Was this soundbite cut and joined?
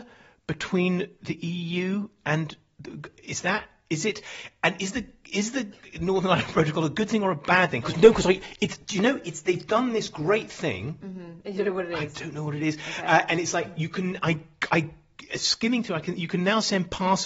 yes; 1 cut; at 7.8 s

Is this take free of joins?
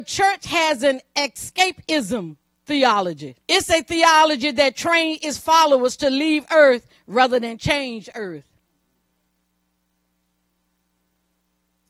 no; 1 cut; at 3.4 s

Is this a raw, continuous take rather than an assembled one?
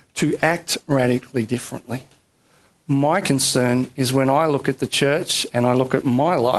yes; 0 cuts

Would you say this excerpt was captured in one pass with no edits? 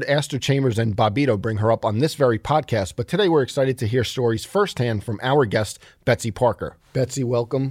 yes; 0 cuts

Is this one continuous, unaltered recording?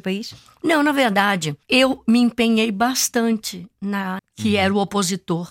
no; 2 cuts; at 1.6 s, 4.2 s

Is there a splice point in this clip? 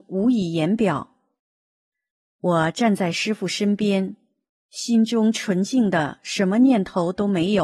no; 0 cuts

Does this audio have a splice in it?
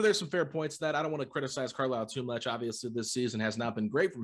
no; 0 cuts

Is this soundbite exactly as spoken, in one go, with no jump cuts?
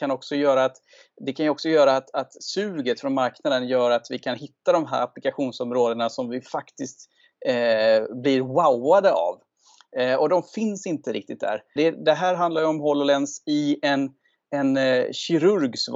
no; 1 cut; at 11.8 s

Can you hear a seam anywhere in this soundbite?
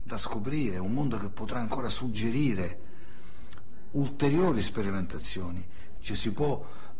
yes; 1 cut; at 6.0 s

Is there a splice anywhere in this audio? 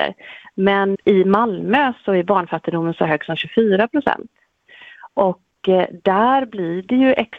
yes; 1 cut; at 0.9 s

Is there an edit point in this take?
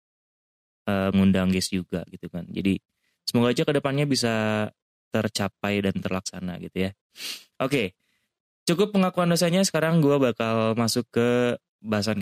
yes; 1 cut; at 1.1 s

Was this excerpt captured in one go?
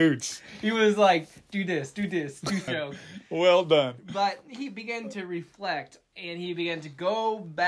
no; 1 cut; at 2.7 s

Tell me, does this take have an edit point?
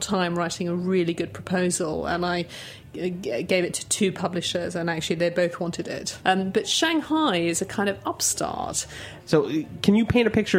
yes; 2 cuts; at 6.2 s, 9.2 s

